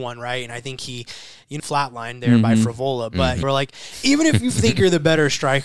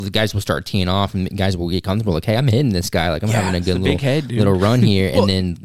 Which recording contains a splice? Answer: first; 2 cuts; at 1.6 s, 3.4 s

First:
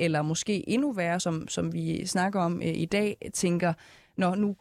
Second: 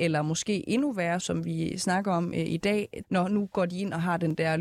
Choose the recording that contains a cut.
second; 2 cuts; at 1.2 s, 3.0 s

